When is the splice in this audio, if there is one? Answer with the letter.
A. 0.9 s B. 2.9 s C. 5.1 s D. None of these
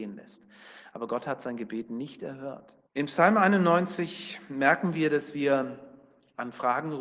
B